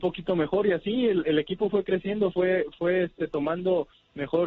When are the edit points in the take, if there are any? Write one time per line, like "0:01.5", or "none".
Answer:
none